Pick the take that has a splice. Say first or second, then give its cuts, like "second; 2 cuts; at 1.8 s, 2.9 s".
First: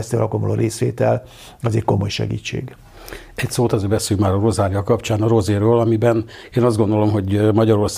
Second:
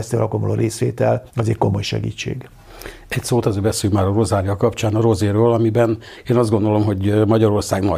second; 1 cut; at 1.3 s